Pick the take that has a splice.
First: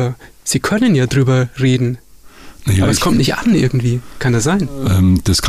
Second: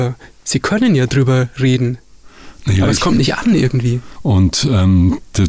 second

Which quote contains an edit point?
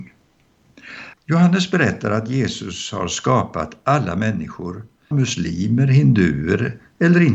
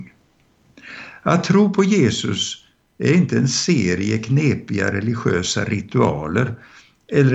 first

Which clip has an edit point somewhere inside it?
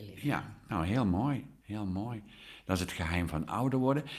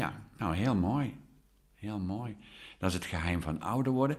first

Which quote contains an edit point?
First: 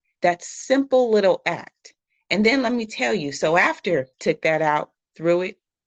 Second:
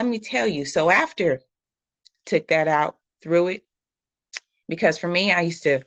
first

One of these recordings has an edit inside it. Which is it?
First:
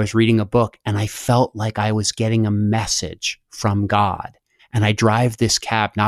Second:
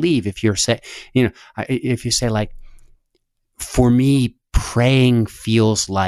first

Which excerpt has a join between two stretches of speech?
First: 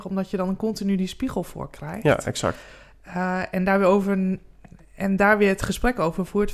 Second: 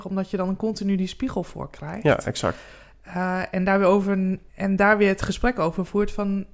second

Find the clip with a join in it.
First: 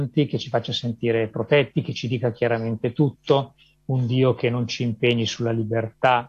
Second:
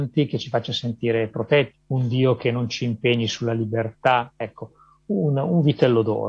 second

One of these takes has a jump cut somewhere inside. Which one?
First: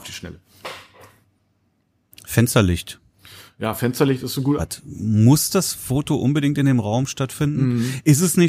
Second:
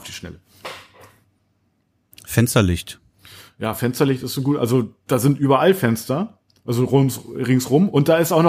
first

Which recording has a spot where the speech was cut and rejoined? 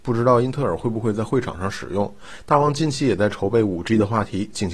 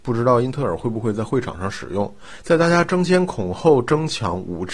second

